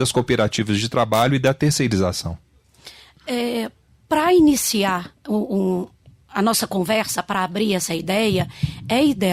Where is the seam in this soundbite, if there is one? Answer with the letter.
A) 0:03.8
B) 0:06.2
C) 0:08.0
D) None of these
D